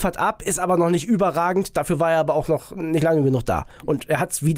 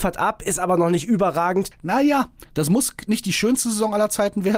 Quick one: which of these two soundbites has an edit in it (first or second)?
second